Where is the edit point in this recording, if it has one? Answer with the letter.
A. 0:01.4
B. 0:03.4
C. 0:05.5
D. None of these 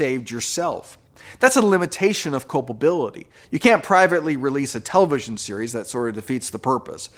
B